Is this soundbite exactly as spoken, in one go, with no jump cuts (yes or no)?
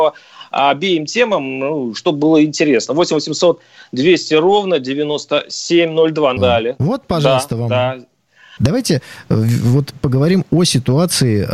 no